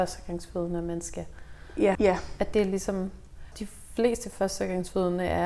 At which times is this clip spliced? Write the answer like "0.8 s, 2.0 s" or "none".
2.0 s, 3.5 s